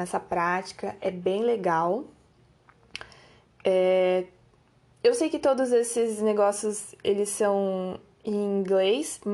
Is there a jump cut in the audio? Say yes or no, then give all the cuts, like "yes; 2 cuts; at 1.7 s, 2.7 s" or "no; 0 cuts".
no; 0 cuts